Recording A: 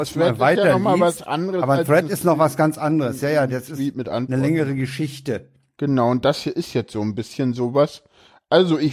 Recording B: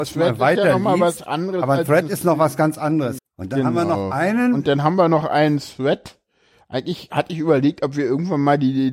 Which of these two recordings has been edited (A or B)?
B